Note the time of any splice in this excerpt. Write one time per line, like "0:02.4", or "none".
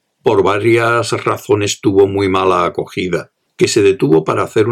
0:03.5